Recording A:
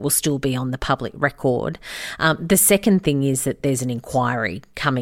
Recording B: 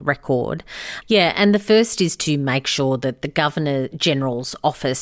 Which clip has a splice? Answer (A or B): B